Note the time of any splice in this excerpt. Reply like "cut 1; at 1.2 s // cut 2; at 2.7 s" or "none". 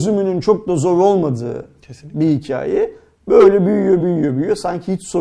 cut 1; at 4.0 s